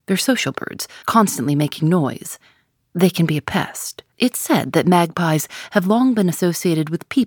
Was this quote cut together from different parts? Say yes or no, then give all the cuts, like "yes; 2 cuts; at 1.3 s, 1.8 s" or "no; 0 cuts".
yes; 2 cuts; at 1.0 s, 4.1 s